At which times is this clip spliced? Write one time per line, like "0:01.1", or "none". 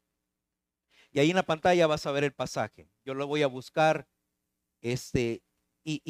none